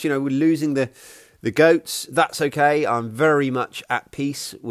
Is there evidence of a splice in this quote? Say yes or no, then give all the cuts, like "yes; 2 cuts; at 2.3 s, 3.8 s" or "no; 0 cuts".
no; 0 cuts